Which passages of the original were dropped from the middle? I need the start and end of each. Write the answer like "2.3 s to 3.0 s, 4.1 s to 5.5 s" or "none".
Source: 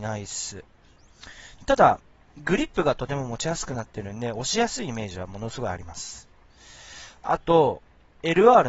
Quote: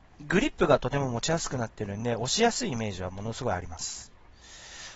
none